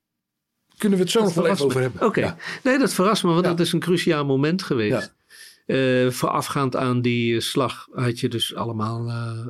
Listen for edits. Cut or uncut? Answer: uncut